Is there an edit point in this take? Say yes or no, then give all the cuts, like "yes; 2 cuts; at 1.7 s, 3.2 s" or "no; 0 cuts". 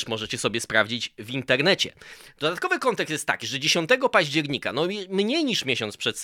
no; 0 cuts